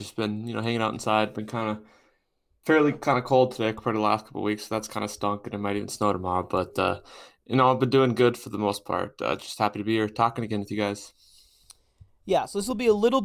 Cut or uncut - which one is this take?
uncut